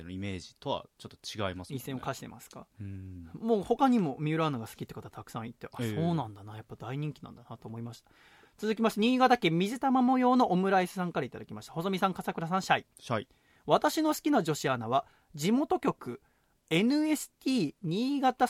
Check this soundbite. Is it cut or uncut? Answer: uncut